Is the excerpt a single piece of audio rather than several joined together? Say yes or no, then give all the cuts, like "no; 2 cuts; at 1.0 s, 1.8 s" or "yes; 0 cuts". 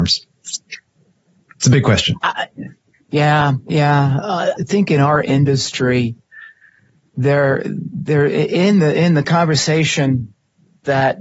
no; 1 cut; at 4.6 s